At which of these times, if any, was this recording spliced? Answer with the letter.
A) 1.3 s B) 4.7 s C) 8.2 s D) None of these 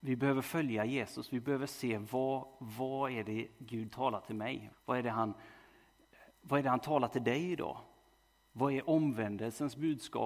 B